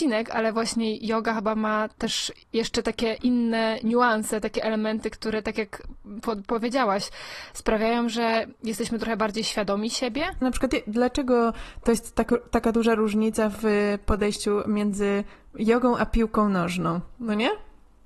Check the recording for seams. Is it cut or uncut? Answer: cut